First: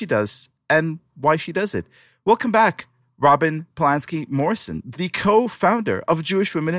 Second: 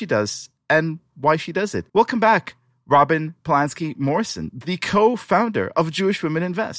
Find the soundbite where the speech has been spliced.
second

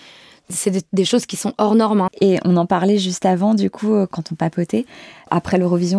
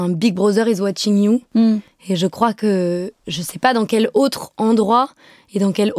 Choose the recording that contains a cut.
first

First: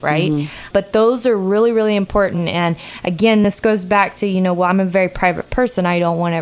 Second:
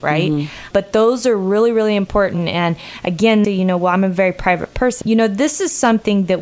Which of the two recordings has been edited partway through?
second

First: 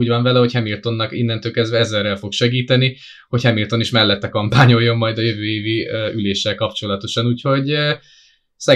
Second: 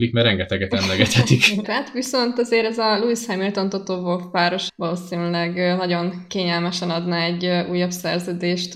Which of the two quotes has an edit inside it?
second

